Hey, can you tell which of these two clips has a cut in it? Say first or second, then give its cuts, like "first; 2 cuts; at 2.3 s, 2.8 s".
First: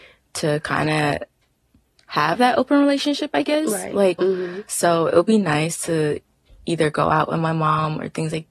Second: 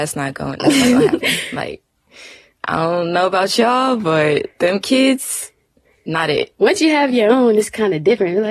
first; 1 cut; at 4.2 s